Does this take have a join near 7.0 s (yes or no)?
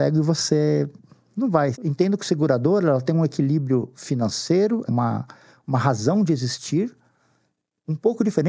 no